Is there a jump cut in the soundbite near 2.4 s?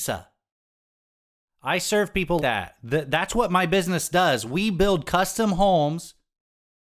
yes; 1 cut; at 2.4 s

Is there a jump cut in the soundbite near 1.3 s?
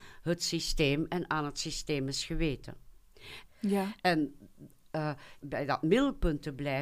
no; 2 cuts; at 3.5 s, 5.4 s

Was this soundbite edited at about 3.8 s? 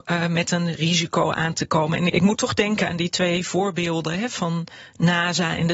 no; 1 cut; at 2.1 s

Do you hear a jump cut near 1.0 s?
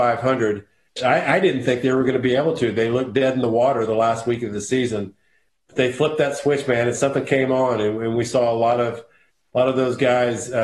yes; 1 cut; at 1.0 s

